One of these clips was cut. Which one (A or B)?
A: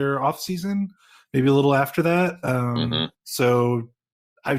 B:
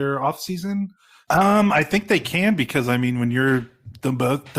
B